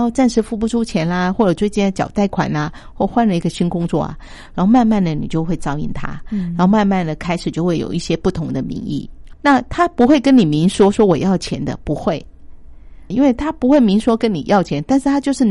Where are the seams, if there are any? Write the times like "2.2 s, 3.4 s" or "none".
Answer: 9.3 s, 13.1 s